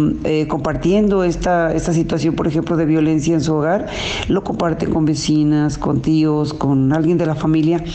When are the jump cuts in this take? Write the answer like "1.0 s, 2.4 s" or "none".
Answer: none